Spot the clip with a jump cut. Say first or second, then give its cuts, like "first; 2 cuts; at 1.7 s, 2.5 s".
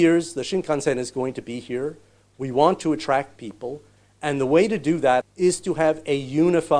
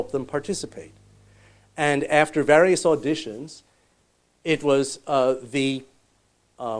first; 1 cut; at 5.2 s